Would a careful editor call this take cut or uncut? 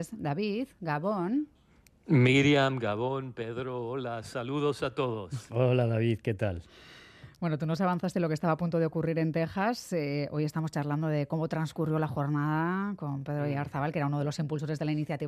uncut